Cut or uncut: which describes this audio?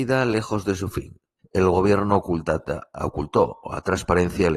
cut